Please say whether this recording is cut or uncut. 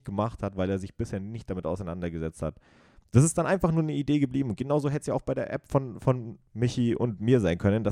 uncut